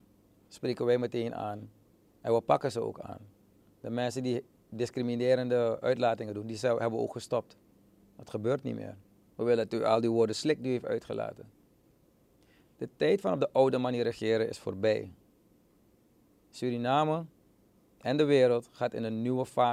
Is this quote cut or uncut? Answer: cut